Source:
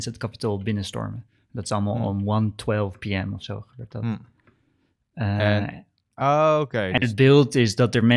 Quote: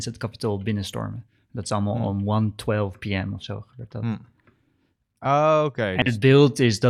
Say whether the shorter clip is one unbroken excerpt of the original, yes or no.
no